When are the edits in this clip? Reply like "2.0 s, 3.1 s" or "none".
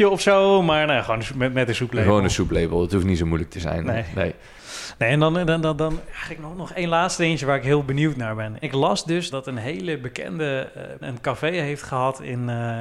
9.3 s, 11.0 s